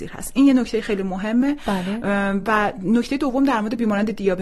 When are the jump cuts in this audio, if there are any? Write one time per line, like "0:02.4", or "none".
none